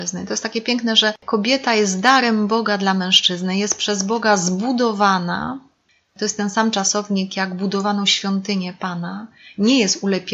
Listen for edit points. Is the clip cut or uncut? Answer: uncut